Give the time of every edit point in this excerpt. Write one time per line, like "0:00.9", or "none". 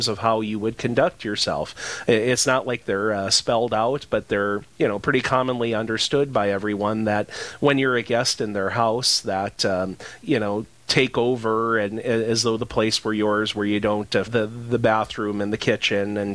0:10.2
0:14.3